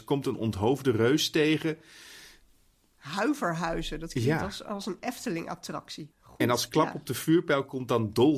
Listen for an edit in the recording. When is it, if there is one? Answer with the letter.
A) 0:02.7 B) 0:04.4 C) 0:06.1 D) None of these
C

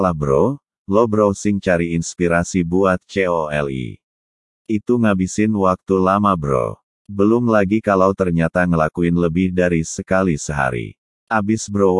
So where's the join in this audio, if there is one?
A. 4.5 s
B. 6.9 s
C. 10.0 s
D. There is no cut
B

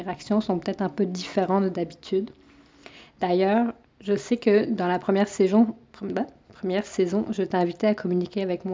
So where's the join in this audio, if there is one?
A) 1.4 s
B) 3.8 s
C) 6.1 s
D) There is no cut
B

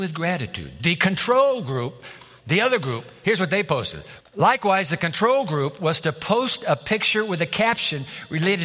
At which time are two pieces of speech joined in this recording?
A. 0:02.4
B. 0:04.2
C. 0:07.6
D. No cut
B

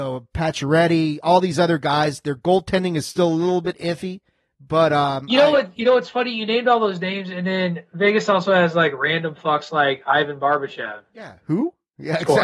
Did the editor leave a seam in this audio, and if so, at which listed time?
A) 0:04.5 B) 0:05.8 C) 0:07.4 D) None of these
D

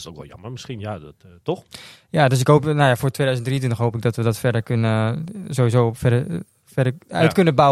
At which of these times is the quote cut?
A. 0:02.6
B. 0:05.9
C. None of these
C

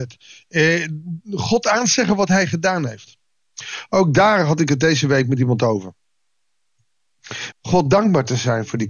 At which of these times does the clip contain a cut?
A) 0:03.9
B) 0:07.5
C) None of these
B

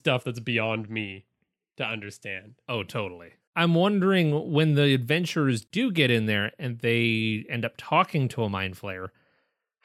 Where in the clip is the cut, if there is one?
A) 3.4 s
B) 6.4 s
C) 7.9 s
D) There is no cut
A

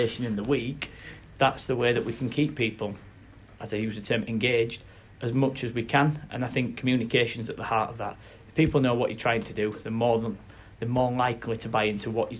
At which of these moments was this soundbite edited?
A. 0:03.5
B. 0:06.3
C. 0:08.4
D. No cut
D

